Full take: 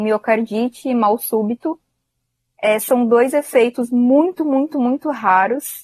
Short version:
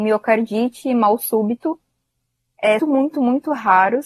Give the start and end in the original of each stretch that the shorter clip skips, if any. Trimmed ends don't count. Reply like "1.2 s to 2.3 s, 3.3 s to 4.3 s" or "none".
2.8 s to 4.4 s